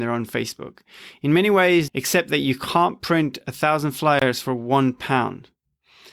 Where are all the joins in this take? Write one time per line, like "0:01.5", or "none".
0:01.9